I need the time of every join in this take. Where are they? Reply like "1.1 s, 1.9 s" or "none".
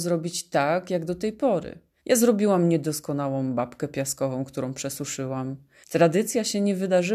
2.0 s, 5.8 s